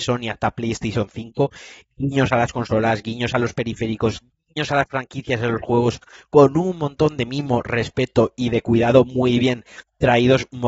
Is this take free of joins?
yes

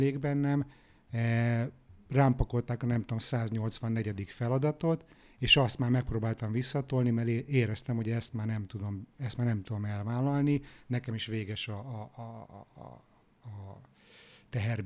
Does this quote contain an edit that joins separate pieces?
no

